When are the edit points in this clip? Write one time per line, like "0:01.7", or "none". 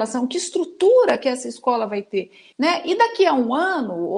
0:02.5